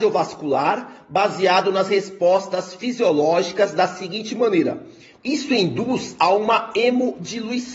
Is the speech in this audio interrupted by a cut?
yes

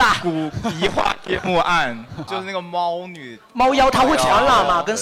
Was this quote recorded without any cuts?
no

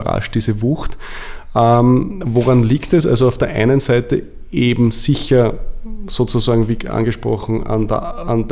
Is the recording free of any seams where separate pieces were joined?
yes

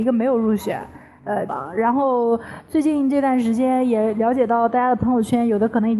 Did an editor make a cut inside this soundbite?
yes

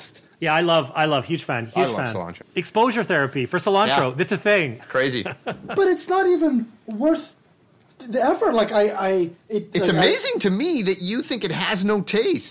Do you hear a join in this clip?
yes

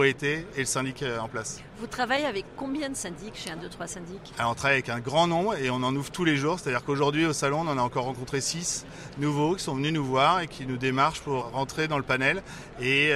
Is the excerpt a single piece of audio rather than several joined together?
no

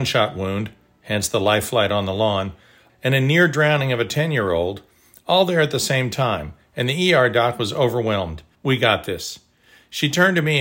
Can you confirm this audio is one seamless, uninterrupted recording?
no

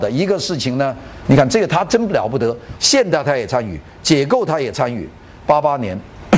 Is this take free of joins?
no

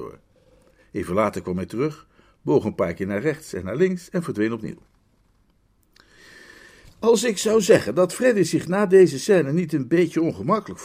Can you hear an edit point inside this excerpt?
no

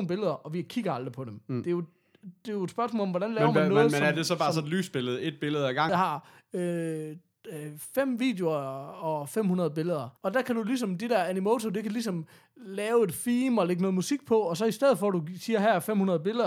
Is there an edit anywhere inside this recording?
yes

